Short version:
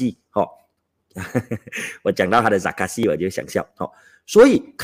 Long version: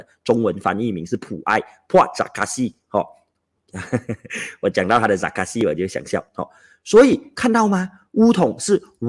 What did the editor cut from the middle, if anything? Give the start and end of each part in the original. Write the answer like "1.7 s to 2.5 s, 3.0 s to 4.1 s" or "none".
none